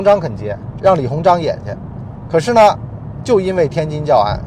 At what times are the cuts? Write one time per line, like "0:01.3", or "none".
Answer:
none